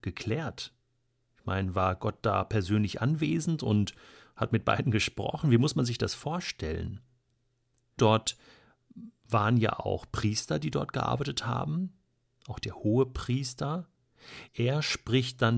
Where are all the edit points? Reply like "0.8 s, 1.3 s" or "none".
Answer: 8.0 s, 14.5 s